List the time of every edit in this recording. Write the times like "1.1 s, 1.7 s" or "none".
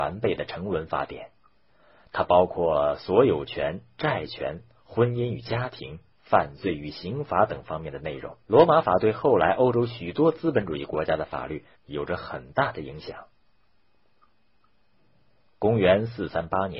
8.4 s, 11.7 s, 15.5 s